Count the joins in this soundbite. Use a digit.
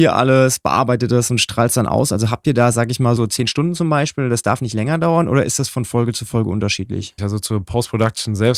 2